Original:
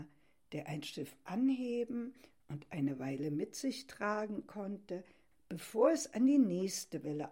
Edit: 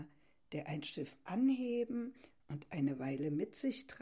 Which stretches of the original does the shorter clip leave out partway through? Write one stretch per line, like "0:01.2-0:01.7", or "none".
none